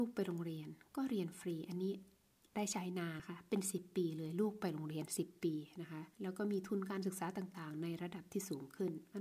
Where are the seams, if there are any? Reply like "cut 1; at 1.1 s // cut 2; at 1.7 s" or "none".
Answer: cut 1; at 3.2 s // cut 2; at 6.1 s